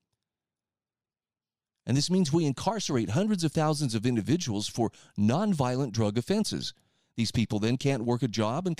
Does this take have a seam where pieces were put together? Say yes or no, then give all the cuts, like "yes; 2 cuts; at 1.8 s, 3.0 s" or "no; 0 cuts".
no; 0 cuts